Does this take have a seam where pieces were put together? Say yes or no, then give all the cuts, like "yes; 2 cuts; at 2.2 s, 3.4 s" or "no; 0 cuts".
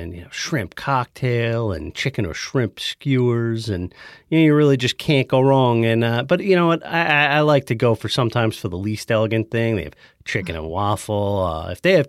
no; 0 cuts